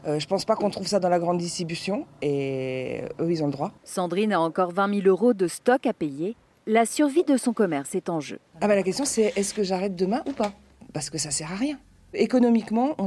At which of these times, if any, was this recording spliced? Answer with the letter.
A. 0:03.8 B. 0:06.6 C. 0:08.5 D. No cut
A